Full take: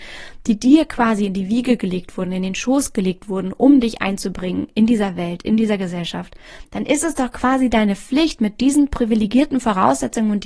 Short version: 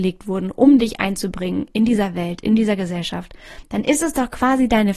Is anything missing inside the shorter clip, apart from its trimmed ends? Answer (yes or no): no